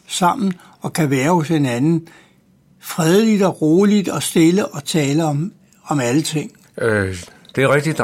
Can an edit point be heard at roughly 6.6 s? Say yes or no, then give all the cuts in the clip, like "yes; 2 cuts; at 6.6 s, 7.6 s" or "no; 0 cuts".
yes; 1 cut; at 6.6 s